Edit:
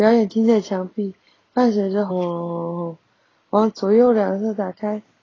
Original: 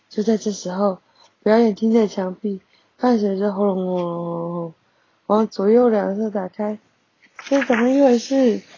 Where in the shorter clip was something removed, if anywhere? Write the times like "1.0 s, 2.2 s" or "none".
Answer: 2.1 s

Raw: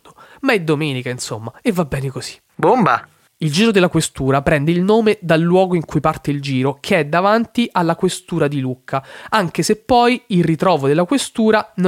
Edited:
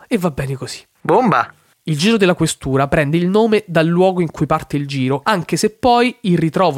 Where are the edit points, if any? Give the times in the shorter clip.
5.2 s

